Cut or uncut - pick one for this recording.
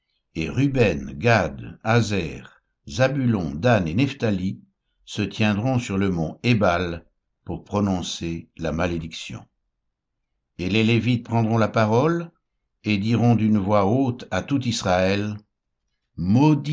uncut